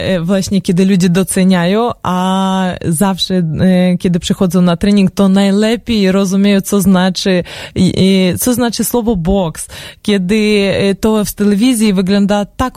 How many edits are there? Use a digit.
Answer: 0